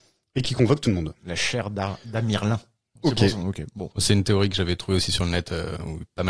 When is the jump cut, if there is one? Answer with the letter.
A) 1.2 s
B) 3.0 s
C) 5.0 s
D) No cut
B